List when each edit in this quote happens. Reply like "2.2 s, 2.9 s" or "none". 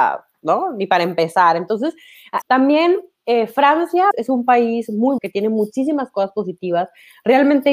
2.4 s, 4.1 s, 5.2 s